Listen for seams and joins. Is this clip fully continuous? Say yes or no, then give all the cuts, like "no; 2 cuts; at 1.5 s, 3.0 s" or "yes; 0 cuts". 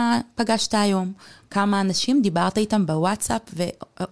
yes; 0 cuts